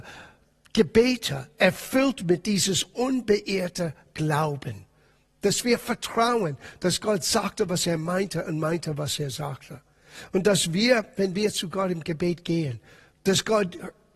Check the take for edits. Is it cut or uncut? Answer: uncut